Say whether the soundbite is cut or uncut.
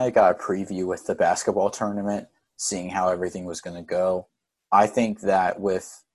uncut